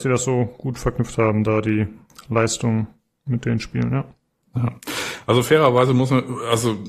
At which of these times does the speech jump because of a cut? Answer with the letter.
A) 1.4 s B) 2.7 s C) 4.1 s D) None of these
D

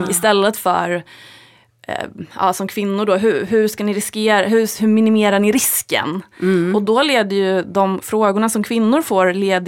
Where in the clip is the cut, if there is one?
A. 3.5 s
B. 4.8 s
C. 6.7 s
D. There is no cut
B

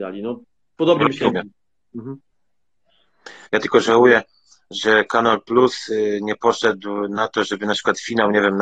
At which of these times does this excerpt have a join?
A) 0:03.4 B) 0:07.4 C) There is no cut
A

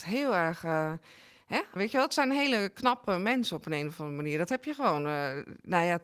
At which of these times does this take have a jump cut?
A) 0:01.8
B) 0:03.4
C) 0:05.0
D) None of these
A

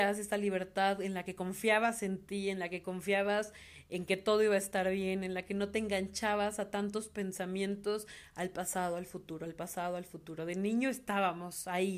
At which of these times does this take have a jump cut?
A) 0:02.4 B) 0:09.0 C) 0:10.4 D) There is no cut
D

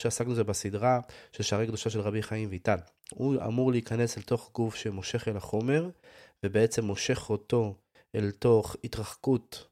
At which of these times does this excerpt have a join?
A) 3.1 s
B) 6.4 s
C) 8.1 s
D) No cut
A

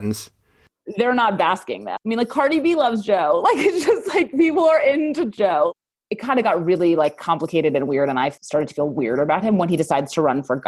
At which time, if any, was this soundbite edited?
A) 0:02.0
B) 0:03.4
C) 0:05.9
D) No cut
A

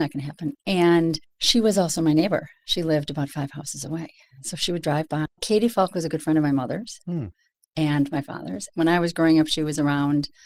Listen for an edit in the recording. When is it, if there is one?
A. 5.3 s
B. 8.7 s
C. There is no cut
A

